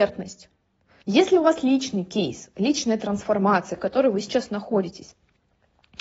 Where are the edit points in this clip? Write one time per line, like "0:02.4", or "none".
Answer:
0:01.0
0:03.8